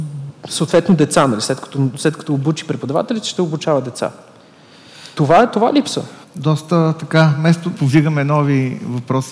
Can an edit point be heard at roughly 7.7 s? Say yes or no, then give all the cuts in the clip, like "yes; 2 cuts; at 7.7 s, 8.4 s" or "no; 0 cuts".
yes; 2 cuts; at 6.2 s, 7.7 s